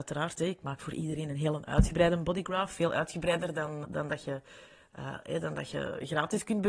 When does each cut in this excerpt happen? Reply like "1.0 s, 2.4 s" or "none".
3.8 s